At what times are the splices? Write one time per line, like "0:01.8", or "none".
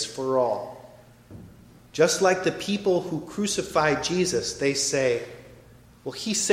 0:01.9